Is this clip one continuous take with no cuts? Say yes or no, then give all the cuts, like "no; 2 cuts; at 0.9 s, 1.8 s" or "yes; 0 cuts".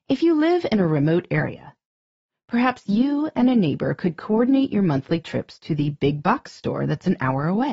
yes; 0 cuts